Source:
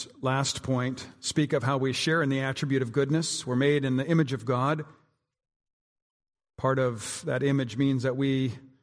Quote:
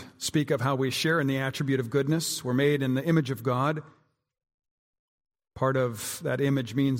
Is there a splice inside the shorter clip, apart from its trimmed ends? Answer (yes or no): no